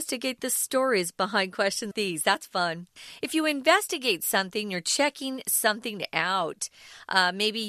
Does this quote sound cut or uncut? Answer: cut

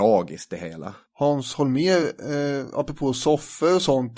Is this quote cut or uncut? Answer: uncut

